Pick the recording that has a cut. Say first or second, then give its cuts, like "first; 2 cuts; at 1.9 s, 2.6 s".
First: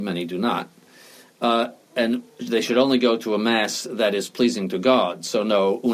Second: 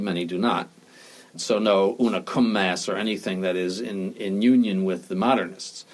second; 1 cut; at 1.3 s